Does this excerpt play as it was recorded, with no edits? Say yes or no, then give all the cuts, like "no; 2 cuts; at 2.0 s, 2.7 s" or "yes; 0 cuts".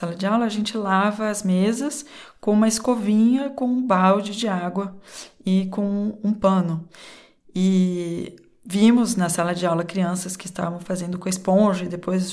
yes; 0 cuts